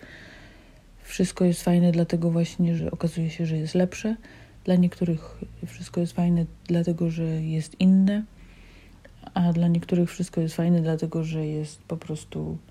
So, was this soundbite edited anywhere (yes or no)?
yes